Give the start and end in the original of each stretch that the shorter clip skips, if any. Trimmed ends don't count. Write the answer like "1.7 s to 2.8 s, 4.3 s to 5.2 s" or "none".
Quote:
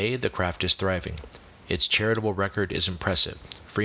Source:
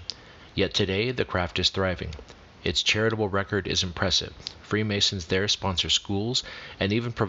none